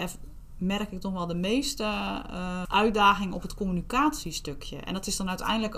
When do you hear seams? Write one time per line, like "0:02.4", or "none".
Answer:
0:02.6